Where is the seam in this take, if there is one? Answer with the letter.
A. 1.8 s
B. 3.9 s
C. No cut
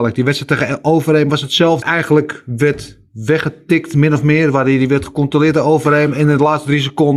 A